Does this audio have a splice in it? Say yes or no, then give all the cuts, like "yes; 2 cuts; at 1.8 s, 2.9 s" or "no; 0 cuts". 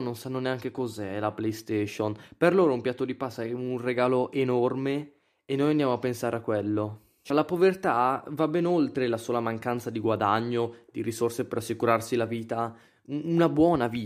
yes; 1 cut; at 7.2 s